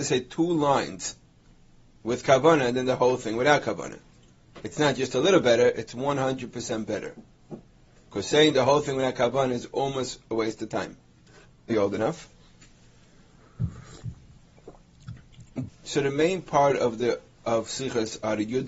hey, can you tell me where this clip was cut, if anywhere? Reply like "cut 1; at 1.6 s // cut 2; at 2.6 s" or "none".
cut 1; at 11.7 s // cut 2; at 15.7 s